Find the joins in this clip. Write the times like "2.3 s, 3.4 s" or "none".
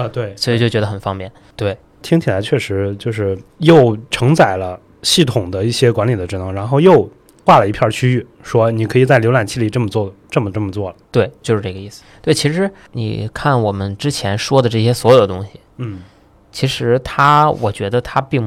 11.0 s

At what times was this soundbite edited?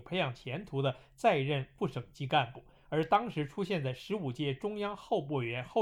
none

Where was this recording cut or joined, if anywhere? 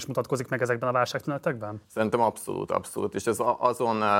none

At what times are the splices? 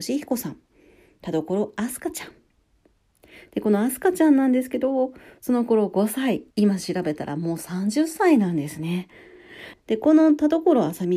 6.5 s, 9.7 s

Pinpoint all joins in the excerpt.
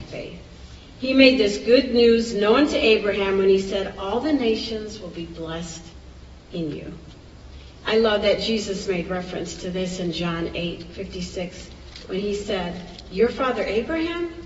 7.8 s

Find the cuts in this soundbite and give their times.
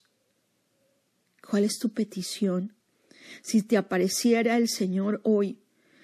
none

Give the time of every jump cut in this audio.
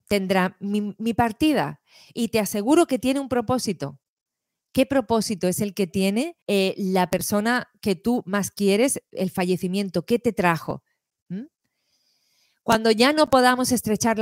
6.4 s

